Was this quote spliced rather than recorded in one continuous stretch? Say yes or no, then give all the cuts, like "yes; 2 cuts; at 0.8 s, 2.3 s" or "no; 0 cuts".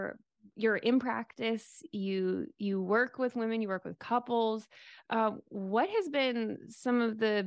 no; 0 cuts